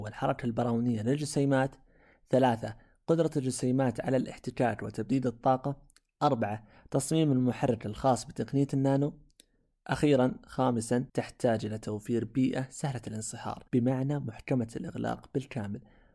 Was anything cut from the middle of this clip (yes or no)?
yes